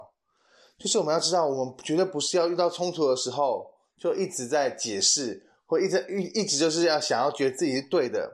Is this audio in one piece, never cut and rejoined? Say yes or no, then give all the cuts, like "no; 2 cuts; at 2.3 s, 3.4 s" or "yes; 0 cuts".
yes; 0 cuts